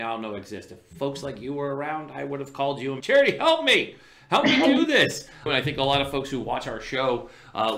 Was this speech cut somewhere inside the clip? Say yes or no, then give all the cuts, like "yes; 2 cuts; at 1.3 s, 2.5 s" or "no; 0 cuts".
yes; 2 cuts; at 3.0 s, 5.5 s